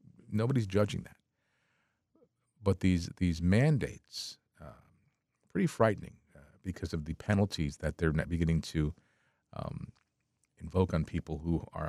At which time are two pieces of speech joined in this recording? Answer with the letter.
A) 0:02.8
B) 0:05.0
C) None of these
C